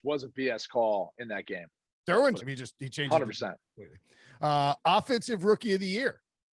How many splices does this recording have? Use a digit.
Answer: 1